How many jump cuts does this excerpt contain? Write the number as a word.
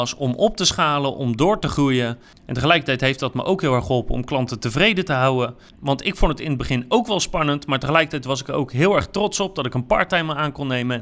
one